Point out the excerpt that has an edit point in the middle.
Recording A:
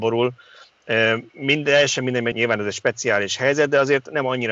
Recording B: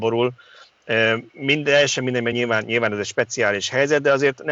A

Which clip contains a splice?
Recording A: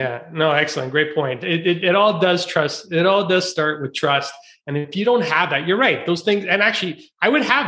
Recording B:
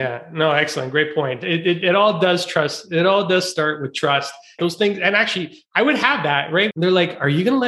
B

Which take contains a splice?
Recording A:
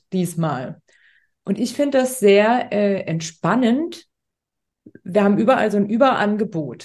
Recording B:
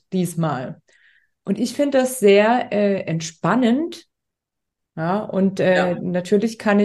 B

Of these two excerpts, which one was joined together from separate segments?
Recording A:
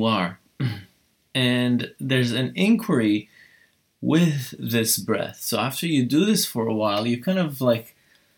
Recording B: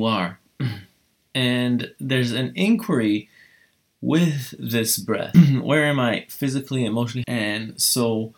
B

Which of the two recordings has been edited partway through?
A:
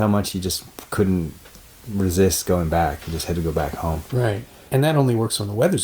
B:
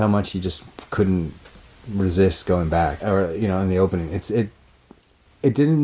B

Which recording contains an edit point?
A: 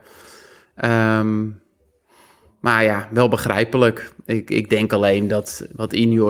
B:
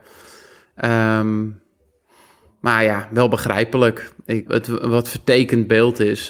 B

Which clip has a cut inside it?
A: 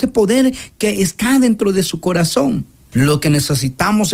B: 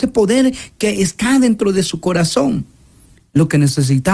A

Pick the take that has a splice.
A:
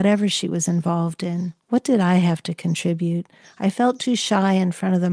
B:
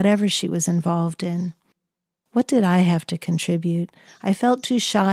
A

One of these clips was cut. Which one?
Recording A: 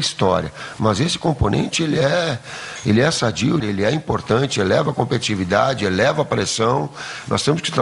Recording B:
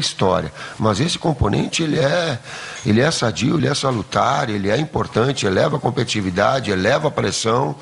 A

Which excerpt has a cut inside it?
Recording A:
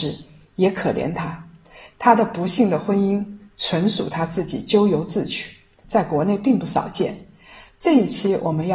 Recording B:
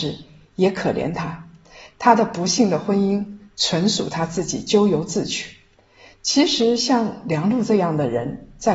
A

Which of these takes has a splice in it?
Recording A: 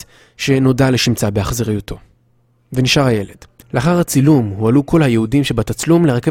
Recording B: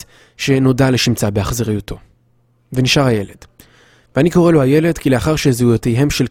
A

